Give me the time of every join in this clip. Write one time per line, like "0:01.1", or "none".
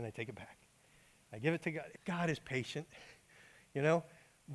0:01.9
0:03.2

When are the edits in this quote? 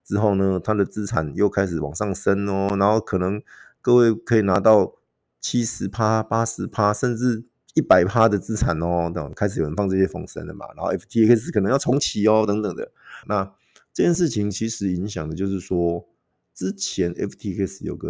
0:13.2

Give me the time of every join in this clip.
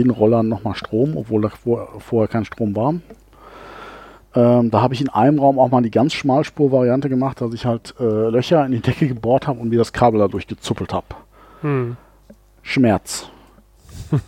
none

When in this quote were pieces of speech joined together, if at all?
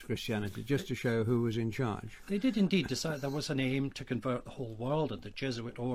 none

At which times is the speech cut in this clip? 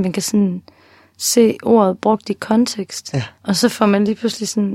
0:03.3

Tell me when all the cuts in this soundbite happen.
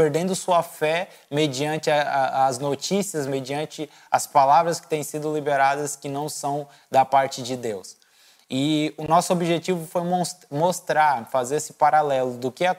none

